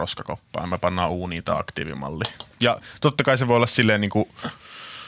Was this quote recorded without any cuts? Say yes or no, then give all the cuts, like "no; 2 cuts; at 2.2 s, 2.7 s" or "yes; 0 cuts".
no; 1 cut; at 2.5 s